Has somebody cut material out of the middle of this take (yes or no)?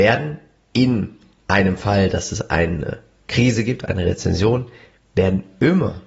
no